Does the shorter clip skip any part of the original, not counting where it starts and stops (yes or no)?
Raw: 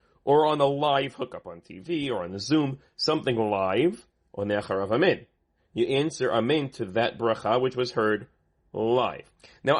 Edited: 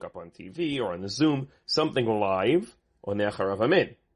no